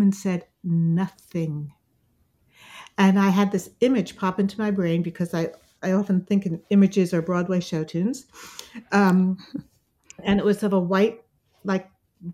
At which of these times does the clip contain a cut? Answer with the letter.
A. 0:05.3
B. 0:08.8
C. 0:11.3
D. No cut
D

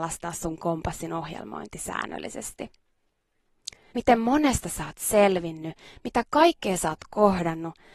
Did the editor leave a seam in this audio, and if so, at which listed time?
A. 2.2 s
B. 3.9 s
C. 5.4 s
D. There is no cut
B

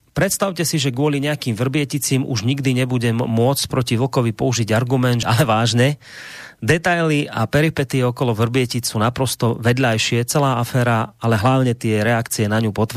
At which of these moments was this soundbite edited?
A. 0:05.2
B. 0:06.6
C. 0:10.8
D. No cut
A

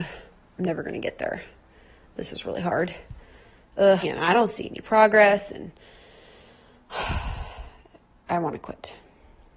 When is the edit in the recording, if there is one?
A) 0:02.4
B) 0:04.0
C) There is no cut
B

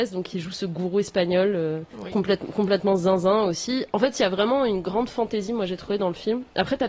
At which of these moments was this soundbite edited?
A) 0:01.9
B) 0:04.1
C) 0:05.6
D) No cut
A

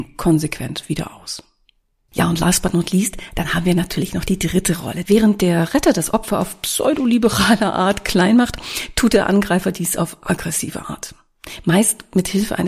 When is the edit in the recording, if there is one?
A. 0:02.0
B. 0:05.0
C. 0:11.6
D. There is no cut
B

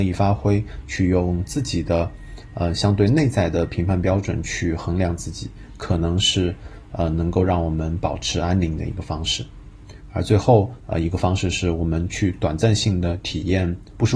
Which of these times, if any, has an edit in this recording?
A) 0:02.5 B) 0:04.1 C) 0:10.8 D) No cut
C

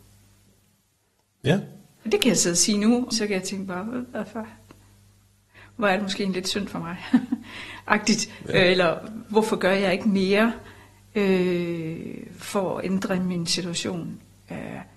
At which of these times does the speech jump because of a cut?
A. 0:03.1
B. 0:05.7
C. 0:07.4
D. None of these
A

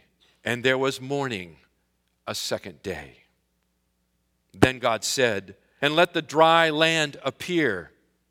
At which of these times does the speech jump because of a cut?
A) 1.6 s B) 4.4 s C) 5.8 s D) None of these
C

